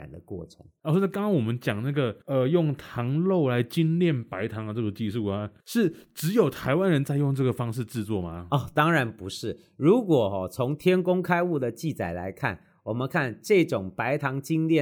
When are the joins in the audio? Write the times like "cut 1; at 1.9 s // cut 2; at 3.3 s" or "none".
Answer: none